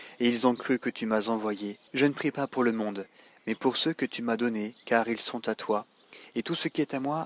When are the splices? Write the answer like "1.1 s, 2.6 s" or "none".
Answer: 1.9 s